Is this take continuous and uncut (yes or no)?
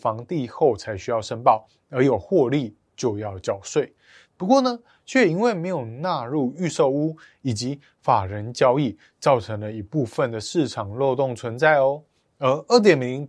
no